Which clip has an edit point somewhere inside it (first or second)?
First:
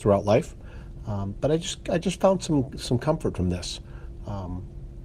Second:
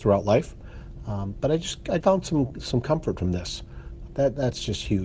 second